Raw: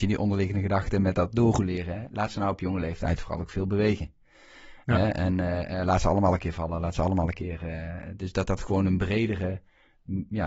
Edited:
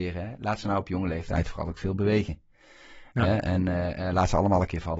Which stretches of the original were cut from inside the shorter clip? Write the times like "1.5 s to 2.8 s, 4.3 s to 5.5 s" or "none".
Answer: none